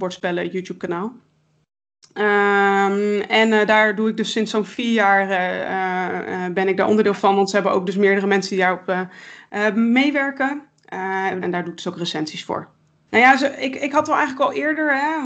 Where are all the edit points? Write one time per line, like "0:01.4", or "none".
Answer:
0:11.4
0:13.1